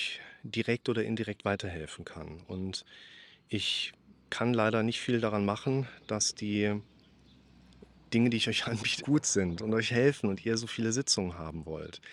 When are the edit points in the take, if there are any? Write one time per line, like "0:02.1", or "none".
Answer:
0:09.0